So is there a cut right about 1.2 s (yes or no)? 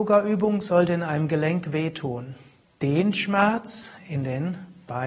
no